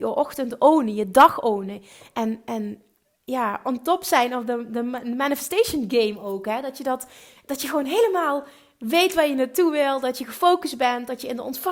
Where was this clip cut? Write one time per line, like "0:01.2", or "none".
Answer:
none

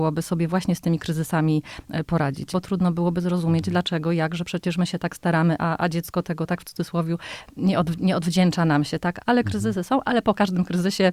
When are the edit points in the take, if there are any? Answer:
0:02.5
0:09.2

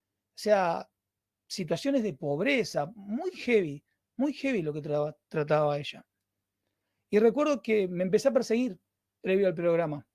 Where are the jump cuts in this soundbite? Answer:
none

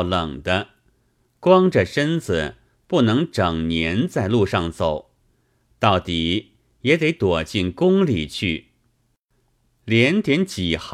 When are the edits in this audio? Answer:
none

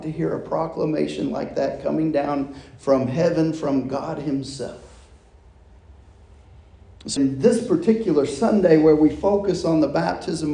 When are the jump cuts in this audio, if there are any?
0:07.2

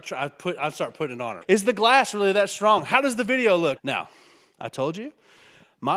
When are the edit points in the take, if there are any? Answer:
0:01.4
0:03.8

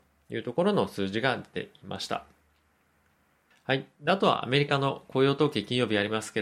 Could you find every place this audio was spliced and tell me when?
0:03.5

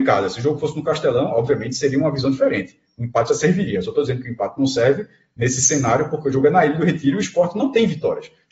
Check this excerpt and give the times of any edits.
none

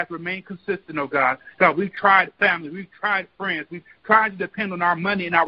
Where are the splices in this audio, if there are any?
none

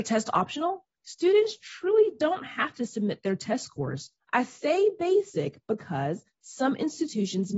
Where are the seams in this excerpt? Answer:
0:04.2

